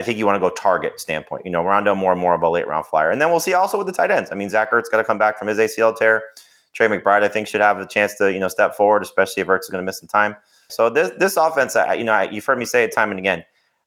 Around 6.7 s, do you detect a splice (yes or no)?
no